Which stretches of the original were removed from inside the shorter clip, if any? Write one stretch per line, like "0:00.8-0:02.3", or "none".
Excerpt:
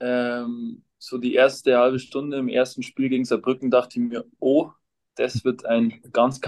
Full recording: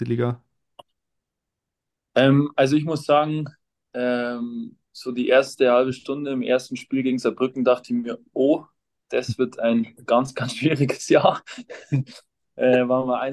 none